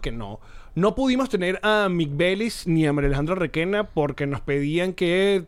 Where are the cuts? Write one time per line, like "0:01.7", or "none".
none